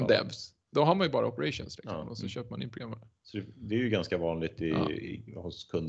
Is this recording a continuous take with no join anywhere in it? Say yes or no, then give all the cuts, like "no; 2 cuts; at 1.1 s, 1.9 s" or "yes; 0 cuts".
yes; 0 cuts